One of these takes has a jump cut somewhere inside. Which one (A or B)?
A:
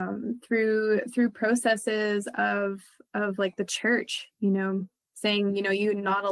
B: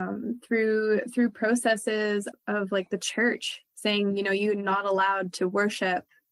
B